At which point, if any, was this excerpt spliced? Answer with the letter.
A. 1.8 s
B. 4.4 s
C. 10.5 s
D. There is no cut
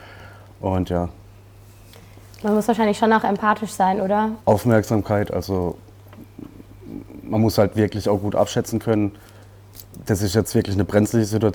B